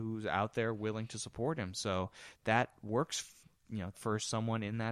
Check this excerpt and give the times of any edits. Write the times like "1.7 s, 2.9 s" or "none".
3.9 s